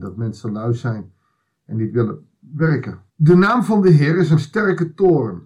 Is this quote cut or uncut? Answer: cut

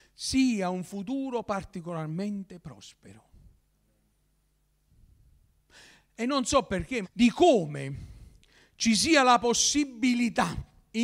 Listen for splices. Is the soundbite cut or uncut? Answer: cut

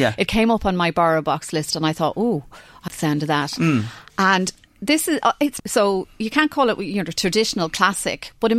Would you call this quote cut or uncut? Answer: cut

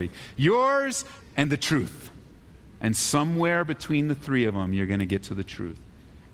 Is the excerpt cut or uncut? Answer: cut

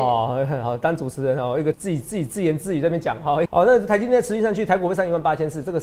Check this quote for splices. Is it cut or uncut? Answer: cut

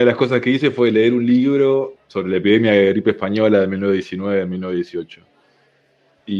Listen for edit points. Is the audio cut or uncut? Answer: cut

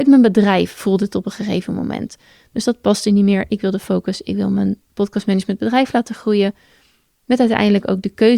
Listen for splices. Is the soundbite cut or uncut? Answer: uncut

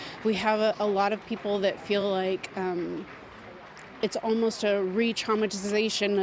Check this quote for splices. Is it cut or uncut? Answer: uncut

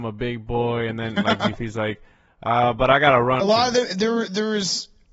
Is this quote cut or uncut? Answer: cut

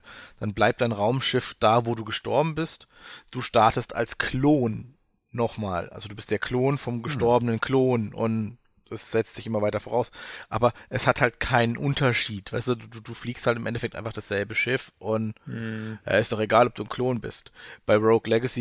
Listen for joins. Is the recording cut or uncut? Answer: uncut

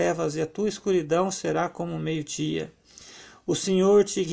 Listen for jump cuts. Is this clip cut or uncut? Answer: uncut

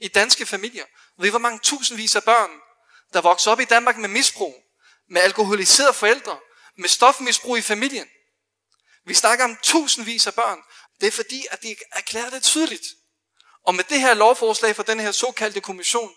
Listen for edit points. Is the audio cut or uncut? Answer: cut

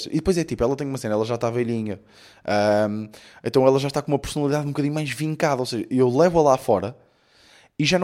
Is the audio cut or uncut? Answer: uncut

